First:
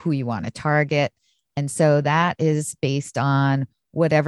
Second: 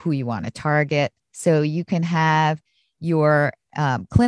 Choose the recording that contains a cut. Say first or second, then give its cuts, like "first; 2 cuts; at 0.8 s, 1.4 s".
second; 1 cut; at 1.2 s